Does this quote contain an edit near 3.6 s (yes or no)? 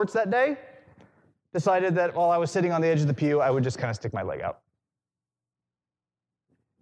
no